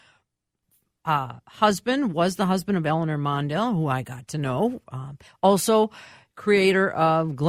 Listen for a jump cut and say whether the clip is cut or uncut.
uncut